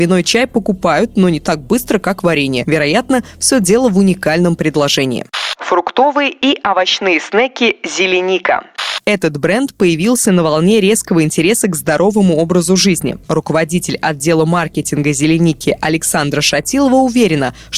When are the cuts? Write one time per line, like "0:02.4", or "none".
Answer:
none